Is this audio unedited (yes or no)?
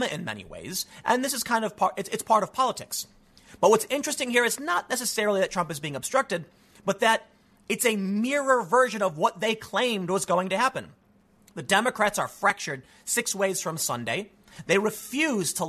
yes